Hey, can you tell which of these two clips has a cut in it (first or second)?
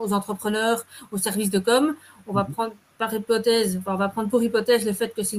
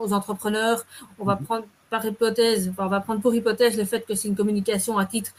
second